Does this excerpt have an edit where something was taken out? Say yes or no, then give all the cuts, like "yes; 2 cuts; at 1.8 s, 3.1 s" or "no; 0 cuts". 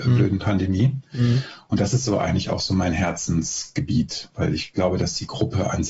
no; 0 cuts